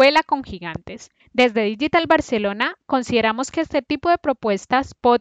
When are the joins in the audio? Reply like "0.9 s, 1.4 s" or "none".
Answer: 1.2 s

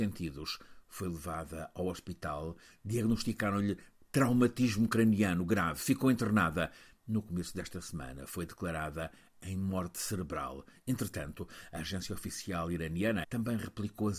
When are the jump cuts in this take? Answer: 13.2 s

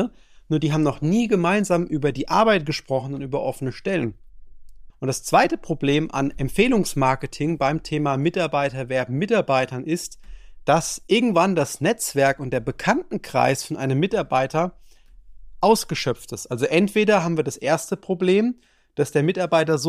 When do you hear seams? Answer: 4.9 s

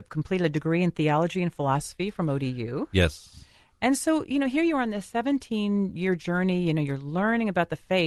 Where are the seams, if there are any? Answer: none

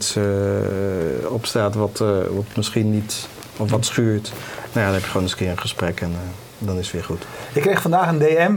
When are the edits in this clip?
none

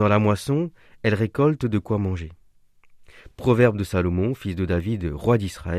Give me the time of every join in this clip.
3.3 s

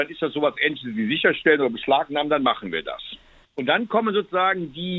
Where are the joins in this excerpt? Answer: 3.4 s

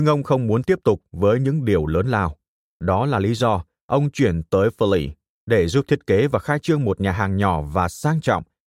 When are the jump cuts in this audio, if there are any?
2.7 s

